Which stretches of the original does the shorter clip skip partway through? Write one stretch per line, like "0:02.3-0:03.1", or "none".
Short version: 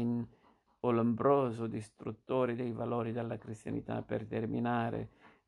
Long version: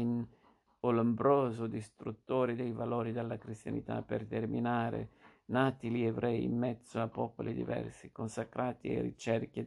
none